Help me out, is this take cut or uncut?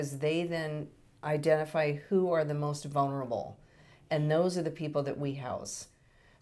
uncut